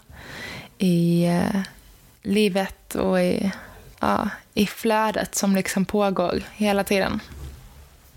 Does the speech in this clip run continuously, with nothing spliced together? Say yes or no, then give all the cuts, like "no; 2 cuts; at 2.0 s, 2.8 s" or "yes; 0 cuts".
no; 1 cut; at 3.9 s